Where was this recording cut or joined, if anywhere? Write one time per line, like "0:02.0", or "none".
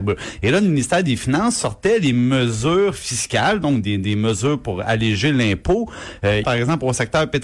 0:06.4